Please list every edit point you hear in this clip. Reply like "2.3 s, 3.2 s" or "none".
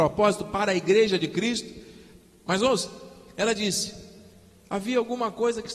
none